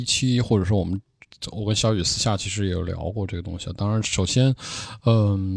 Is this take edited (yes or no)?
no